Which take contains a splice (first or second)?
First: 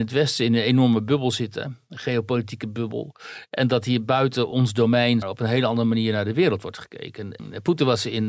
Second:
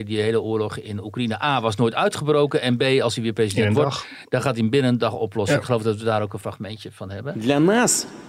first